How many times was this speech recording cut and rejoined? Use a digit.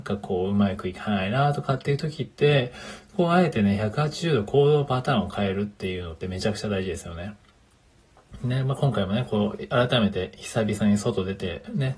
0